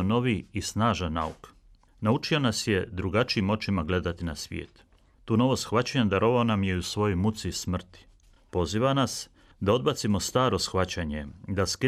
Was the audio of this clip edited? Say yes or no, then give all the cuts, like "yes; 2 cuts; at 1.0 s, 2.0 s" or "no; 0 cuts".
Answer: no; 0 cuts